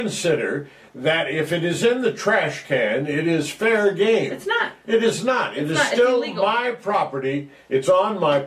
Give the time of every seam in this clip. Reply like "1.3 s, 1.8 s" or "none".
none